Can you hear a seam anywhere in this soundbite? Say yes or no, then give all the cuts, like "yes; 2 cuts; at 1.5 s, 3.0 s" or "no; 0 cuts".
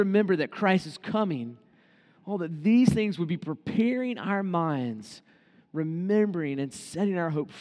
no; 0 cuts